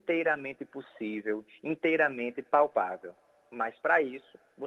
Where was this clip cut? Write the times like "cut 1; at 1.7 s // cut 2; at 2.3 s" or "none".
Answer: none